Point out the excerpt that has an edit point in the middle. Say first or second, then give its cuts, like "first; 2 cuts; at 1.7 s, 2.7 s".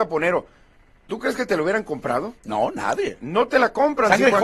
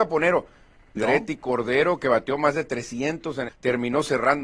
second; 2 cuts; at 1.0 s, 3.5 s